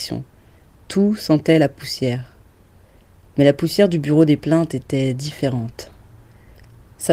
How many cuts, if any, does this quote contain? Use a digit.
0